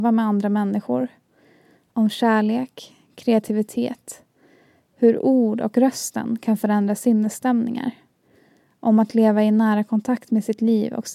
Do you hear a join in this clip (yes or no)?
no